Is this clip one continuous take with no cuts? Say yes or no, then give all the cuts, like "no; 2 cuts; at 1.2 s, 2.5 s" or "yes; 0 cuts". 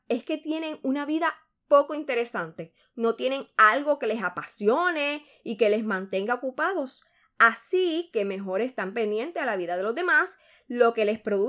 yes; 0 cuts